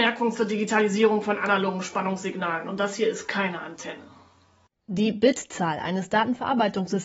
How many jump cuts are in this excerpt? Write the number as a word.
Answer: zero